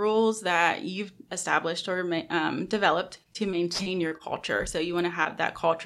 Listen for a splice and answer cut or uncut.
uncut